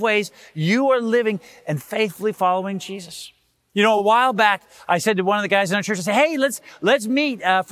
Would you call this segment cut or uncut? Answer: uncut